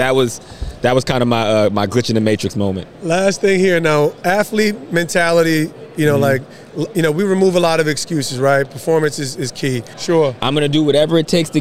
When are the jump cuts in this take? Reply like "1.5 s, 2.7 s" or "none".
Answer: 9.9 s